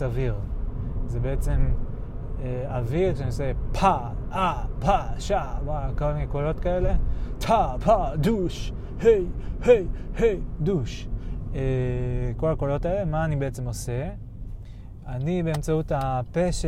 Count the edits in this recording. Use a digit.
0